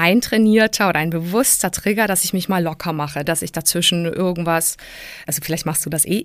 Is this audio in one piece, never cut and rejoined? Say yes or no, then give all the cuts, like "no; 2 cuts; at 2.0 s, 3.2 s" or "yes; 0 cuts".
no; 2 cuts; at 3.2 s, 5.3 s